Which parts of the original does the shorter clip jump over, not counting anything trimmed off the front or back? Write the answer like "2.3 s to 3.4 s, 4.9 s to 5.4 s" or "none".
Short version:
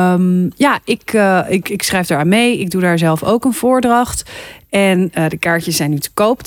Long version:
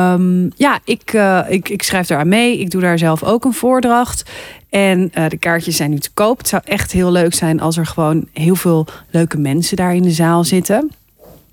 none